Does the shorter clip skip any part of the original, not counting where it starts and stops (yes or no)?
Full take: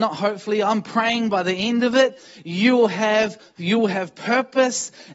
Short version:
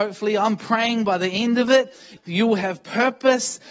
yes